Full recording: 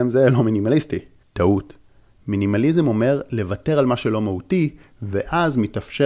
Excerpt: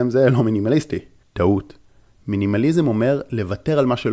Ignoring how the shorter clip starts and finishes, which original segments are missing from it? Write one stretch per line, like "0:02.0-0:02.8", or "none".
none

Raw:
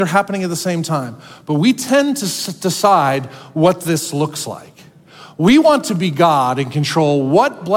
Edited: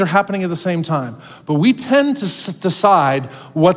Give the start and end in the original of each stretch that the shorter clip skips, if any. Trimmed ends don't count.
none

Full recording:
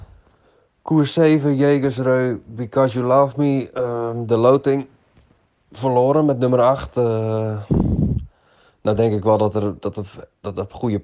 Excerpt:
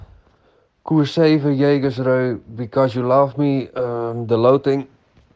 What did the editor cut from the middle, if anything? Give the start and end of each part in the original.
none

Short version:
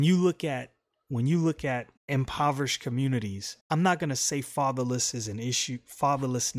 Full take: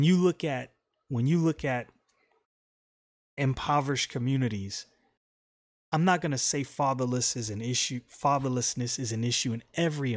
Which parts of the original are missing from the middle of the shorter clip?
0:02.0-0:03.3
0:04.9-0:05.8

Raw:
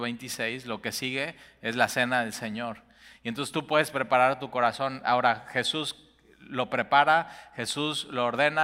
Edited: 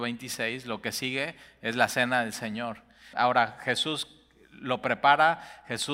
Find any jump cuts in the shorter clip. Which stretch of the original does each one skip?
0:03.1-0:05.0

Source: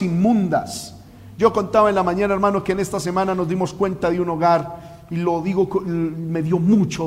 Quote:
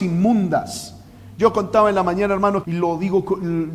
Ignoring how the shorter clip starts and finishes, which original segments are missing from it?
0:02.6-0:05.1

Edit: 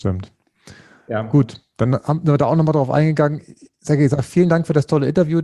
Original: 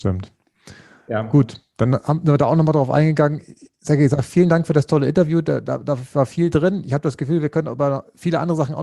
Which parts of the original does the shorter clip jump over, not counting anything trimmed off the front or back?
none

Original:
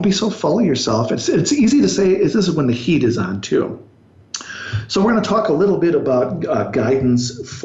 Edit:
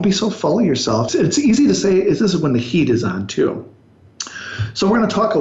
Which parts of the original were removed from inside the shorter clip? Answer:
0:01.1-0:01.2

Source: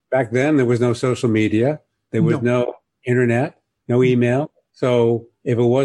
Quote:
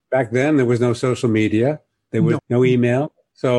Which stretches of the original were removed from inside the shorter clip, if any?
0:02.4-0:03.8

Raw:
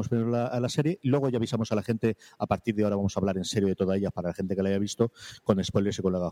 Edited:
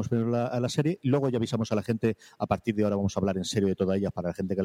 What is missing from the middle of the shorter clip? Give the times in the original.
none

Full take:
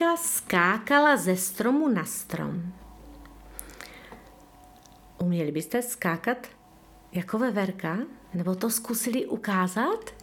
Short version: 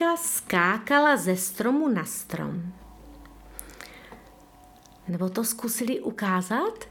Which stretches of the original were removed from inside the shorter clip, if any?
0:05.0-0:08.3

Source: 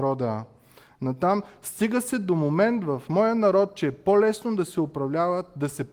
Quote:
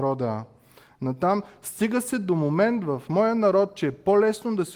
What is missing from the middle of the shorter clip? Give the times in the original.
none

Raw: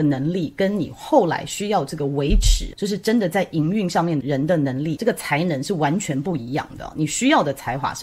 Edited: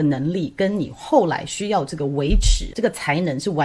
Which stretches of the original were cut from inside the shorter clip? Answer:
0:02.7-0:05.0

